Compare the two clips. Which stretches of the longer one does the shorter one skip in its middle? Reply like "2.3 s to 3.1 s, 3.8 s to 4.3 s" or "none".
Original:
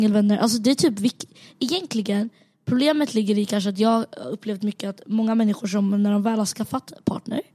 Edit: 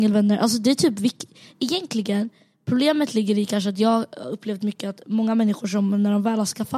none